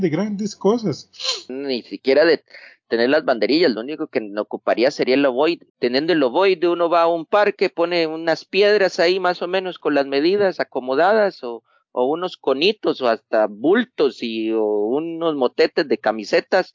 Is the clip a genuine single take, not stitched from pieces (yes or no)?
no